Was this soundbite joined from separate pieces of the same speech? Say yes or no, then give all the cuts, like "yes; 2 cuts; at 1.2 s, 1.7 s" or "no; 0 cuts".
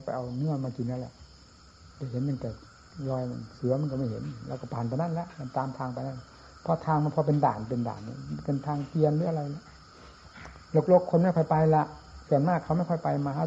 yes; 1 cut; at 1.9 s